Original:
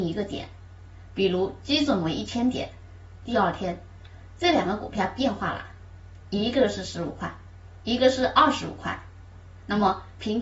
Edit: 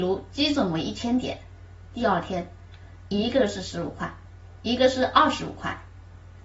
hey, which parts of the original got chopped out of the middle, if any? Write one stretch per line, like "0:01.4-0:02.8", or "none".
0:04.3-0:06.2